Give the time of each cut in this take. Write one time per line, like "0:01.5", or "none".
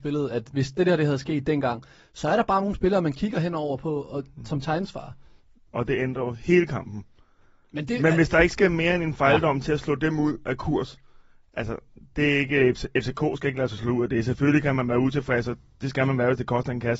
0:05.7